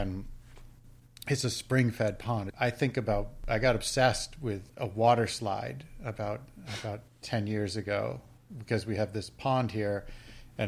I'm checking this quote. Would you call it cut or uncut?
cut